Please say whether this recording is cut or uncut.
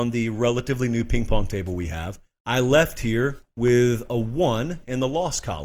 uncut